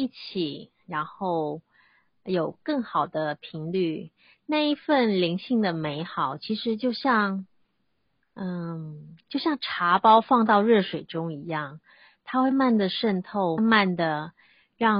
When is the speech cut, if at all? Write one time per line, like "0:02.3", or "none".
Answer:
0:12.5
0:13.6